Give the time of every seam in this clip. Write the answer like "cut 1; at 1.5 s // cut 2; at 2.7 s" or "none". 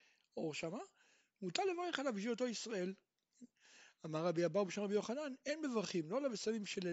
none